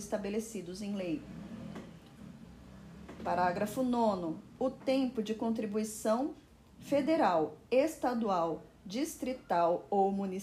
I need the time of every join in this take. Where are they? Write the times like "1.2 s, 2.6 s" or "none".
none

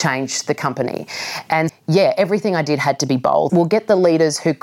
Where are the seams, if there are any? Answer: 1.7 s, 3.5 s

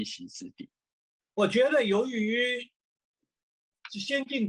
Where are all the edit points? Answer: 1.2 s

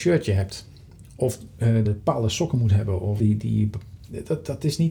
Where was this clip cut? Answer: 1.8 s, 3.2 s

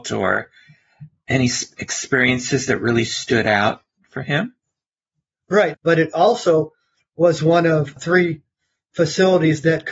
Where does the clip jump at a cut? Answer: 5.7 s, 8.0 s

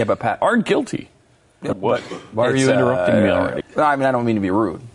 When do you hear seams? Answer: 1.7 s, 3.6 s

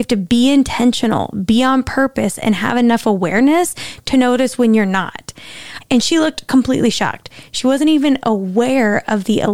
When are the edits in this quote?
5.8 s

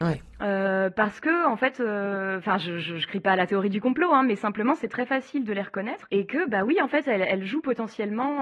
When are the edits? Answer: none

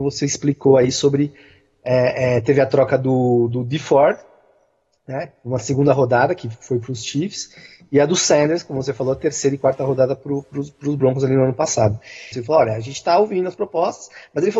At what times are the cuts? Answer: 12.3 s

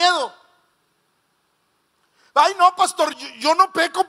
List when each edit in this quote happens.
3.1 s

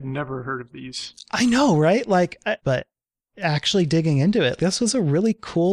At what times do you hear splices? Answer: 2.6 s, 4.6 s

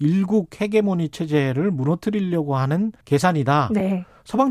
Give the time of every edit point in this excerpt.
3.0 s

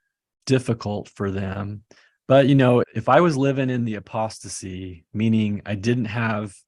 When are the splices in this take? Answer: 2.8 s

